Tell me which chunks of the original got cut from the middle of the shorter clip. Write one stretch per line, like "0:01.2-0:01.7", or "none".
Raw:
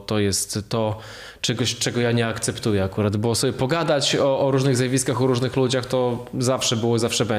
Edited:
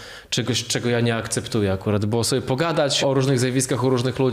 0:04.1-0:04.4